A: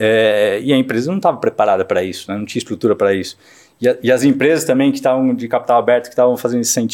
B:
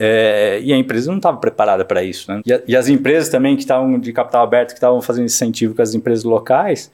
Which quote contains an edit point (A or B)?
B